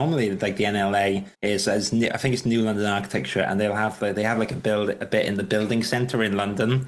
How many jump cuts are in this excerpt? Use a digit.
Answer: 1